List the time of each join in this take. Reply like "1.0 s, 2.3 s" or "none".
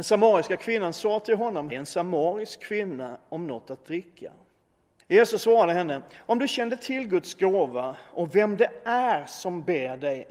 1.7 s, 5.0 s